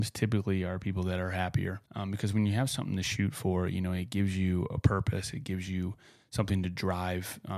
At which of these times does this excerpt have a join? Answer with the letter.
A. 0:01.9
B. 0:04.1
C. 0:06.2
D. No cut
A